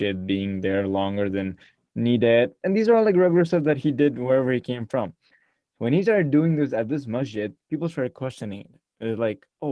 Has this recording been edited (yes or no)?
no